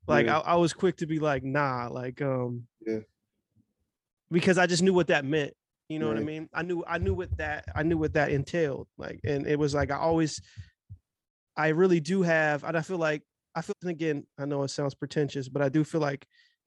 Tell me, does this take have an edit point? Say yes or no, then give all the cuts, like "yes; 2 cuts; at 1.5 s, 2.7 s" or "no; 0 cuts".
yes; 1 cut; at 13.7 s